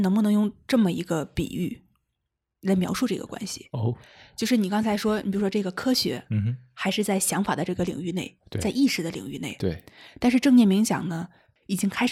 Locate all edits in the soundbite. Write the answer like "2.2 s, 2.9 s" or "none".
none

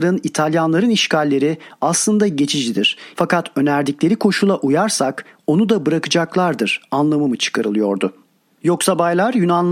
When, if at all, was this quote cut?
3.1 s

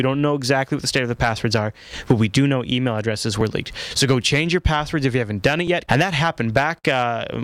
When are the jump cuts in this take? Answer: 5.9 s

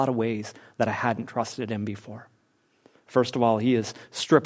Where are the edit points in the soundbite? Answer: none

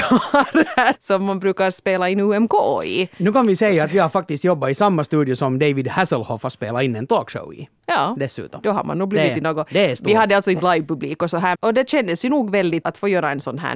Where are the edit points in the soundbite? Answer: 0.9 s, 11.5 s, 12.8 s

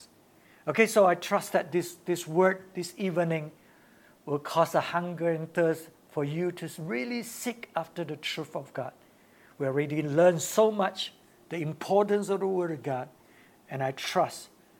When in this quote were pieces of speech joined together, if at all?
none

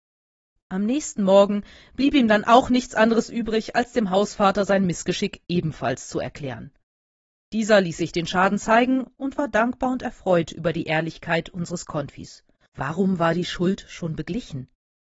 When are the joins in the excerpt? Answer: 12.7 s

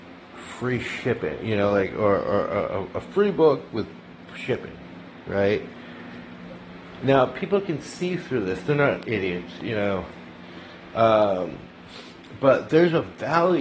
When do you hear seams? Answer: none

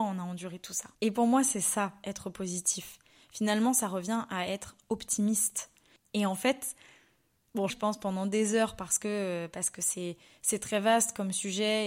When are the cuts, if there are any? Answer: 0.9 s, 7.7 s

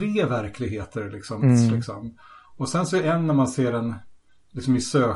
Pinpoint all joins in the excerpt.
1.4 s

